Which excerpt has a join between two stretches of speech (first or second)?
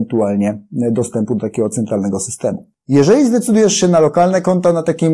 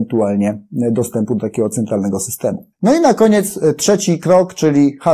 second